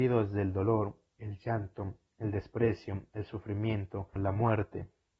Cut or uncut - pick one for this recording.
cut